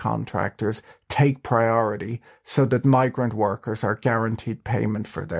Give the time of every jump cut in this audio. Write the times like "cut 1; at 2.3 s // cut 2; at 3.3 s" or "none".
none

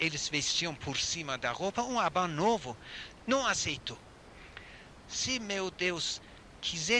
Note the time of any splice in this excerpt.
cut 1; at 3.2 s // cut 2; at 5.0 s

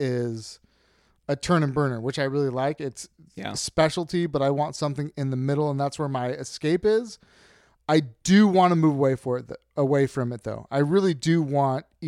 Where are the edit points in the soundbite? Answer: none

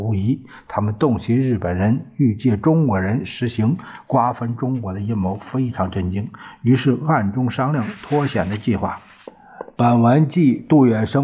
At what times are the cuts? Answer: none

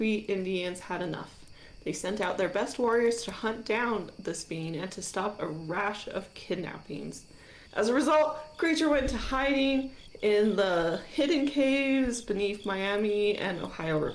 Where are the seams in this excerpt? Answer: cut 1; at 7.7 s

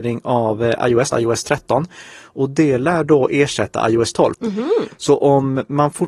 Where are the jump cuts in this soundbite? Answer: cut 1; at 1.1 s // cut 2; at 4.3 s

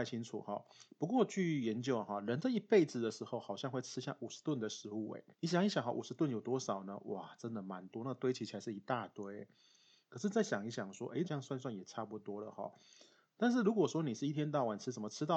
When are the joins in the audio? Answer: cut 1; at 5.3 s // cut 2; at 11.2 s

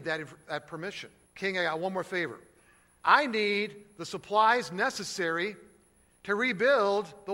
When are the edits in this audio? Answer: cut 1; at 1.3 s

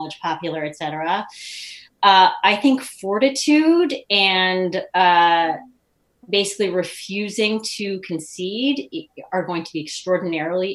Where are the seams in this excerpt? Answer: none

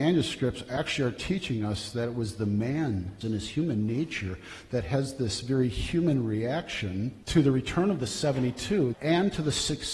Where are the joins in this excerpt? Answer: cut 1; at 3.2 s // cut 2; at 7.2 s // cut 3; at 8.9 s

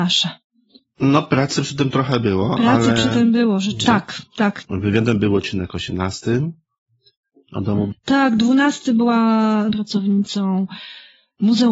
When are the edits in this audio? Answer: cut 1; at 3.8 s // cut 2; at 7.9 s // cut 3; at 9.7 s

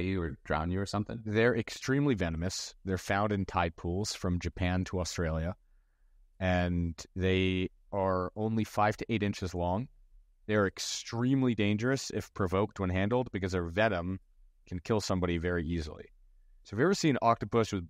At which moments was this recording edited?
none

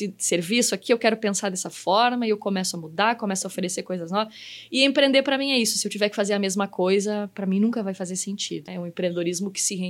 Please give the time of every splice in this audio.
cut 1; at 8.7 s

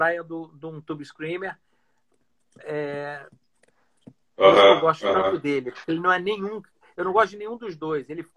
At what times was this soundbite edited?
cut 1; at 4.2 s

